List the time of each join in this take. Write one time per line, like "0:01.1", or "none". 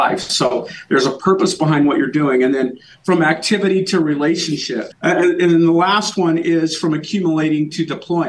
0:04.9